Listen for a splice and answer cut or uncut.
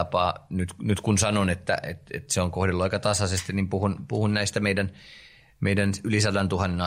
uncut